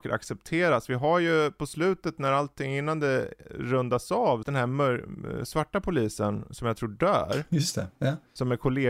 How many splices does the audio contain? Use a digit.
1